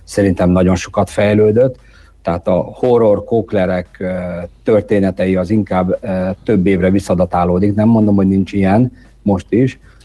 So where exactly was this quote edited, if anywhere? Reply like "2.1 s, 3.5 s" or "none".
none